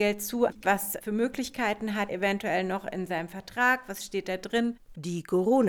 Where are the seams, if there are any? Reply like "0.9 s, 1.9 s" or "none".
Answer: 2.1 s